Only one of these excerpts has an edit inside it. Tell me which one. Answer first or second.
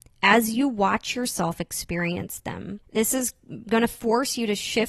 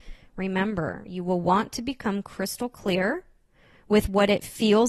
first